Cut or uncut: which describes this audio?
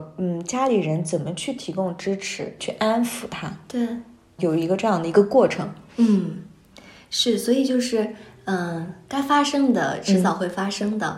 cut